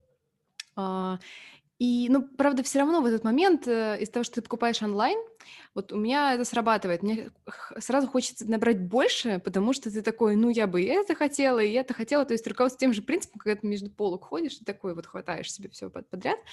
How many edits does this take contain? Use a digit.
0